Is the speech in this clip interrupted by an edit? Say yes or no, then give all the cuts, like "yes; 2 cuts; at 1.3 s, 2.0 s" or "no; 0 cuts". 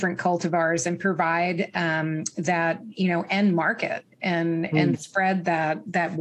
no; 0 cuts